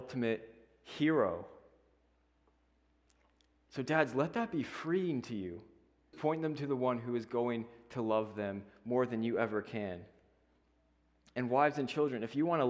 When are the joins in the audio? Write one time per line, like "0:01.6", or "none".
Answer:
0:06.1